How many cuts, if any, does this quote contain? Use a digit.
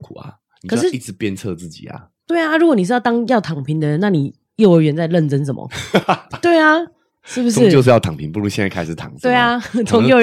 0